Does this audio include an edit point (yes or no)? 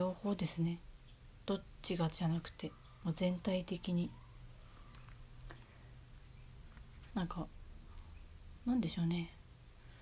yes